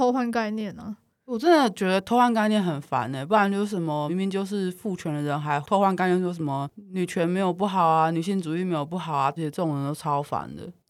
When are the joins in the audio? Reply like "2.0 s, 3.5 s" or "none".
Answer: 4.1 s, 9.4 s